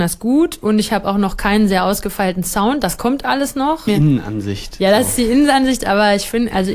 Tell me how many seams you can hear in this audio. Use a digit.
1